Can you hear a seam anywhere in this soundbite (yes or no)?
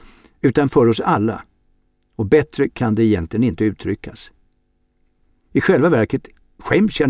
yes